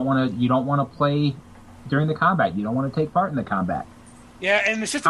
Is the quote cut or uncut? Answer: uncut